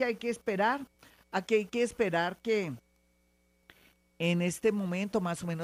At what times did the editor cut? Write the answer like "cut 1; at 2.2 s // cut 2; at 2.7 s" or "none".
none